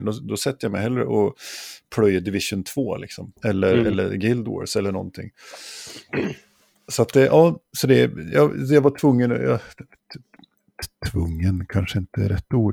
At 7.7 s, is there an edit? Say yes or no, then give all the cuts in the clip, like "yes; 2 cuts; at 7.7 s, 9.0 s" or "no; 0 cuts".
no; 1 cut; at 3.4 s